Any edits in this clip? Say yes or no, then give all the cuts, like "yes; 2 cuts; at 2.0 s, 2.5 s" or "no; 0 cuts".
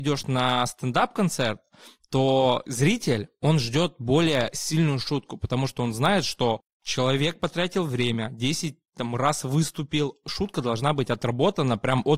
no; 0 cuts